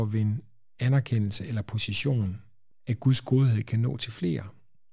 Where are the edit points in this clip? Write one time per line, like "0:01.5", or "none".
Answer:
0:02.7